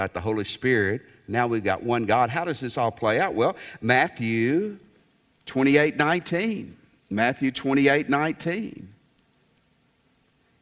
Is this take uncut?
yes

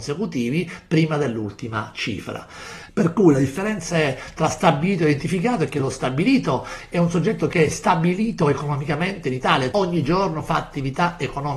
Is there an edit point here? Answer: yes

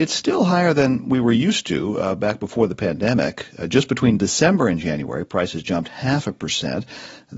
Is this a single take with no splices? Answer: yes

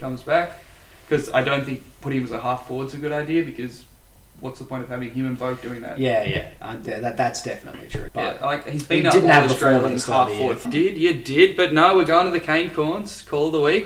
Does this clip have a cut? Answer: yes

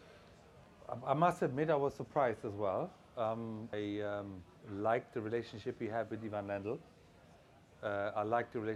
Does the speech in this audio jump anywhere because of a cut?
yes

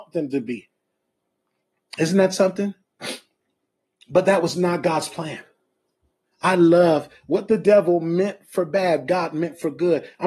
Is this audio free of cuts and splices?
yes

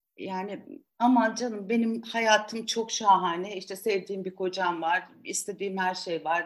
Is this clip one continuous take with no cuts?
yes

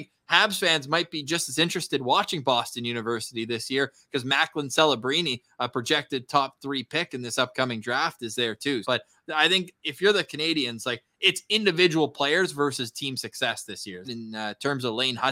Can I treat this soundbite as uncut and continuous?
no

